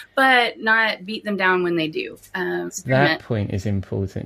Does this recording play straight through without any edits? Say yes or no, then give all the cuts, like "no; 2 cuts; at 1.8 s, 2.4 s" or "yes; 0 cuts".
no; 1 cut; at 2.7 s